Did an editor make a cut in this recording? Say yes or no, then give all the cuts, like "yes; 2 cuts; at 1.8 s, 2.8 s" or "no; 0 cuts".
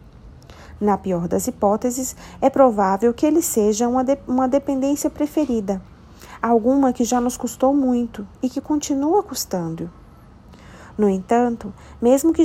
no; 0 cuts